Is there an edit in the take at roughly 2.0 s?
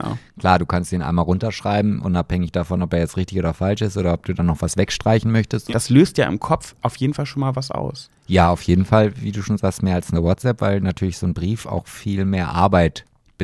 no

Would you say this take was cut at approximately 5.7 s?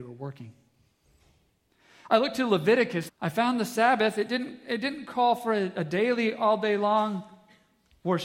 no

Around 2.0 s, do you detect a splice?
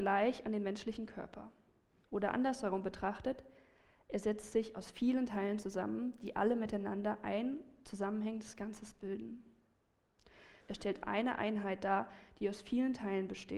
yes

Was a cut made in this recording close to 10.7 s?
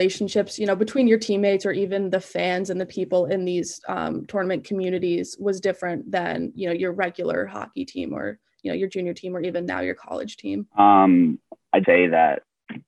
yes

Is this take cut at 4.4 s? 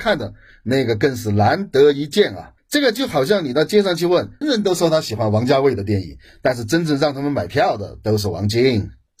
yes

